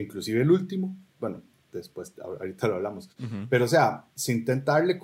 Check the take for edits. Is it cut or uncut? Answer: uncut